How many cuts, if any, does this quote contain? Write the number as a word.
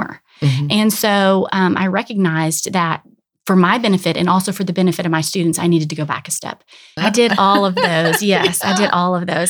one